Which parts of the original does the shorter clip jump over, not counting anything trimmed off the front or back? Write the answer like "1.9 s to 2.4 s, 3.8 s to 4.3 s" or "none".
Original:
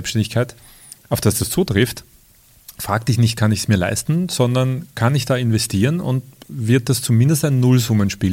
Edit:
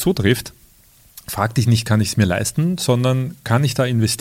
none